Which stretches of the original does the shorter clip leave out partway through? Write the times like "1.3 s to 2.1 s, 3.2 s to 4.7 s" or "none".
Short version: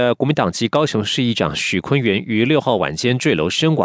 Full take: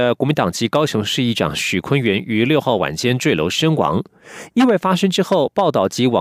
none